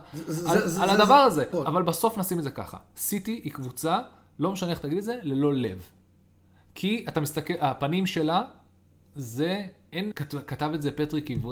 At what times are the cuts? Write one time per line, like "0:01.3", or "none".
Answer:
0:01.5
0:10.1